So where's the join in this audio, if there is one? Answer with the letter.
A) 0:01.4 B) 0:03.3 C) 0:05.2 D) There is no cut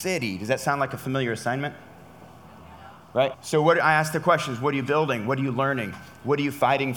B